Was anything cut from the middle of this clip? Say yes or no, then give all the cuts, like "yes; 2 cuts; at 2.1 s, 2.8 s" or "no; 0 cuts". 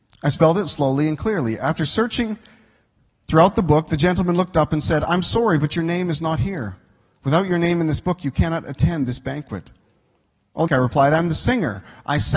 yes; 1 cut; at 10.7 s